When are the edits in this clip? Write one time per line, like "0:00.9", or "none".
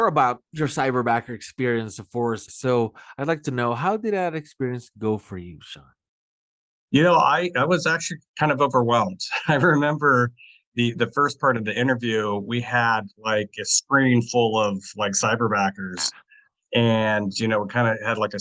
0:02.5